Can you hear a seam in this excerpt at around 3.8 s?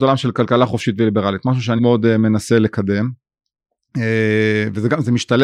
no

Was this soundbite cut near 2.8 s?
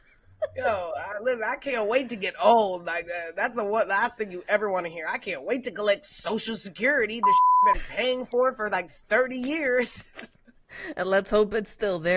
no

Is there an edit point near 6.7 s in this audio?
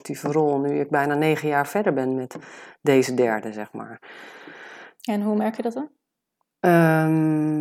no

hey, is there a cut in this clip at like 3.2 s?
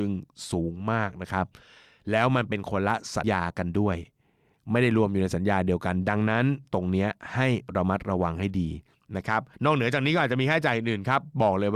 yes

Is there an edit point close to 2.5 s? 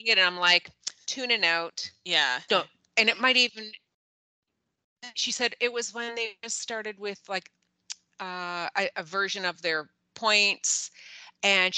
yes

